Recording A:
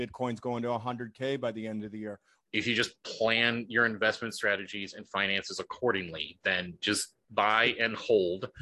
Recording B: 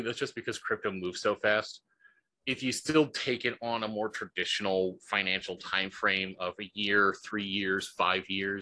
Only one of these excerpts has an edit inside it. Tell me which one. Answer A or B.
A